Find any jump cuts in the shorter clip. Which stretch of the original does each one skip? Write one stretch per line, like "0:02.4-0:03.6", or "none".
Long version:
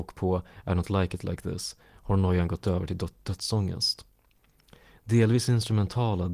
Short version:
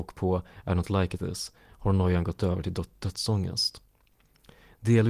0:01.2-0:01.4